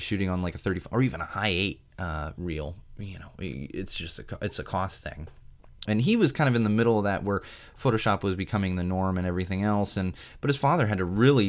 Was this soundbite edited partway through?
yes; 1 cut; at 5.8 s

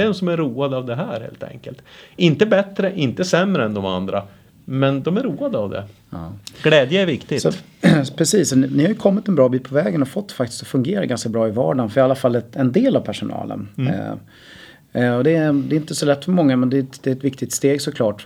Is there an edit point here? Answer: no; 0 cuts

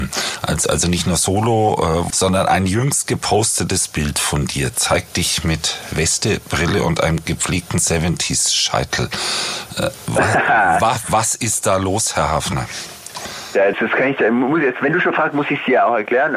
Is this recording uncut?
no; 2 cuts; at 2.1 s, 13.7 s

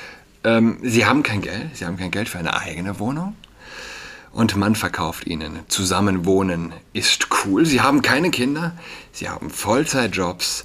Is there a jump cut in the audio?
no; 0 cuts

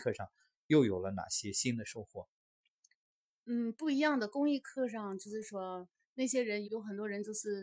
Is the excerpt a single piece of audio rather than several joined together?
no; 1 cut; at 6.6 s

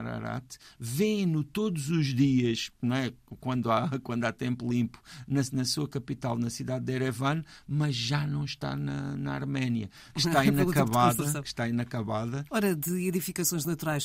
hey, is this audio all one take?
no; 2 cuts; at 10.1 s, 12.5 s

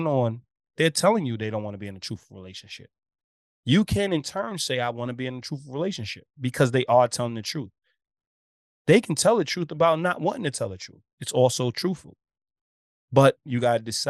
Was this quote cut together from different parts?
no; 0 cuts

